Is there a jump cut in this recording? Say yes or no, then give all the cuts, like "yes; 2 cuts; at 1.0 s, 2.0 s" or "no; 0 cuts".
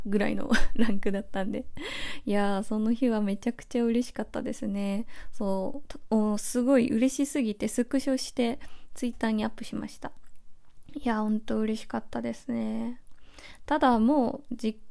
no; 0 cuts